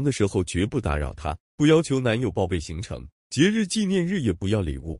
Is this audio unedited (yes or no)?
yes